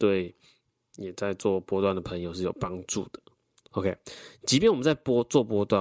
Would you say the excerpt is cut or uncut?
uncut